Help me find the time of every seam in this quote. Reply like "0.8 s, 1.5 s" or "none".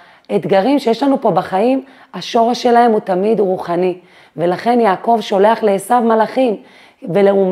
none

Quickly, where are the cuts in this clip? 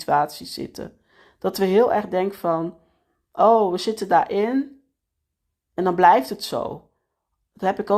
none

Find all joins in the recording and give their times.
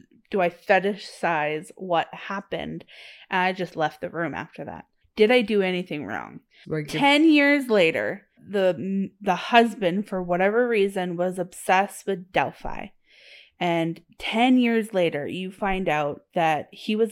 5.0 s, 6.6 s, 8.4 s

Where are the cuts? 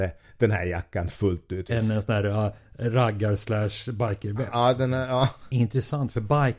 1.7 s, 5.5 s

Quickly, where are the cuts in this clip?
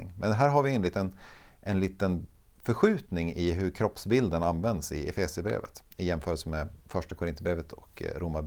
5.9 s

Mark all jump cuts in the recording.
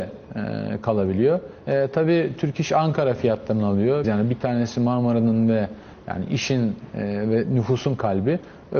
1.6 s, 4.0 s

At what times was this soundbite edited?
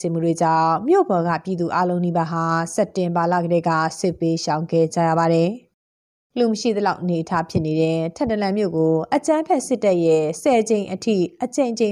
none

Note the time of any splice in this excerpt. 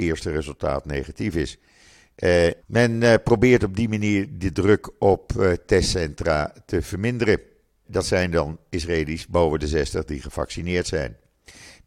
2.6 s, 7.8 s

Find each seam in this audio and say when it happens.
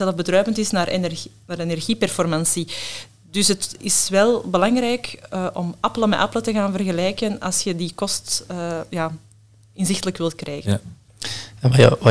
none

